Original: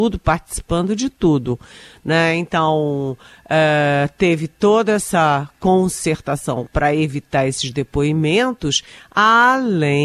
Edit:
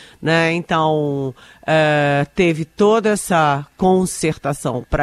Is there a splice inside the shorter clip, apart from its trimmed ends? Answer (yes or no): no